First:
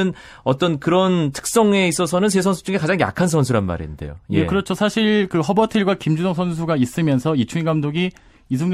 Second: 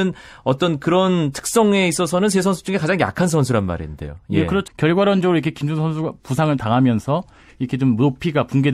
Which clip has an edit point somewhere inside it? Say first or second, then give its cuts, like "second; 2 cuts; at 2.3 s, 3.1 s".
second; 1 cut; at 4.7 s